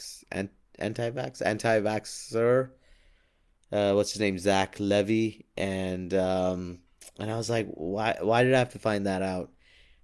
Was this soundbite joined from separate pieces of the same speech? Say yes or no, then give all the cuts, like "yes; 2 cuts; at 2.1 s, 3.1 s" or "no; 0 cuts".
no; 0 cuts